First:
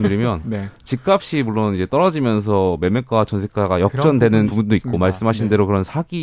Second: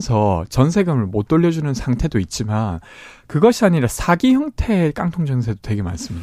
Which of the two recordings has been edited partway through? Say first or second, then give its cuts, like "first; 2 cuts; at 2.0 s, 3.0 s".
first; 1 cut; at 4.4 s